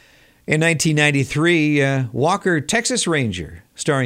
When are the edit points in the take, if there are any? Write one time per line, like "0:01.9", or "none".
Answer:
none